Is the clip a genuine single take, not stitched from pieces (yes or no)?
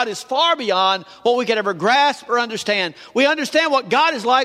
yes